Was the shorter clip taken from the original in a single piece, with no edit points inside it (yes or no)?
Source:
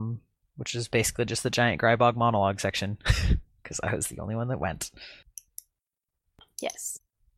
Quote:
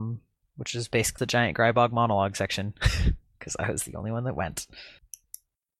no